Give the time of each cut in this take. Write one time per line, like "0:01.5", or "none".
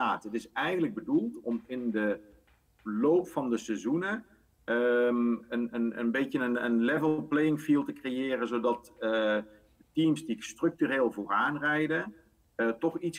none